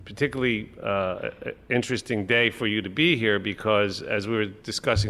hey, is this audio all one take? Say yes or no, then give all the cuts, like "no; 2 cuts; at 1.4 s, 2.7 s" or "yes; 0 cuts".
yes; 0 cuts